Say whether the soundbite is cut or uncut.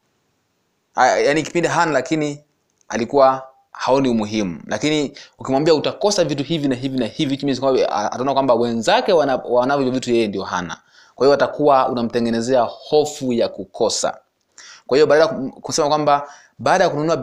cut